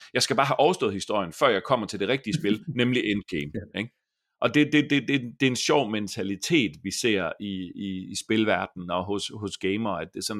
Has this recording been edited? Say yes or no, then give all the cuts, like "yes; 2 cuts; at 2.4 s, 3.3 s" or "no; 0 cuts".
no; 0 cuts